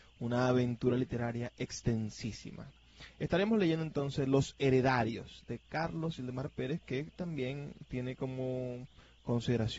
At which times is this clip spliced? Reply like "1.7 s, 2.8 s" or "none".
none